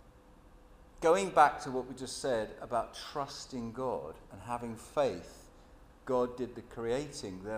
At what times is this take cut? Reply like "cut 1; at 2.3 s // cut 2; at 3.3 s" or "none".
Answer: none